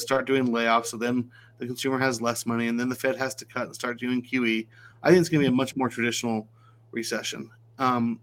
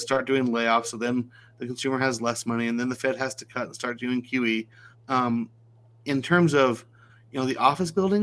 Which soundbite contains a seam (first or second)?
second